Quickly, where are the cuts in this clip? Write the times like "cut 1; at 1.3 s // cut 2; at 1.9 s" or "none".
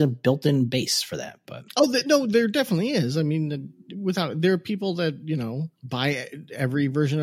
cut 1; at 5.7 s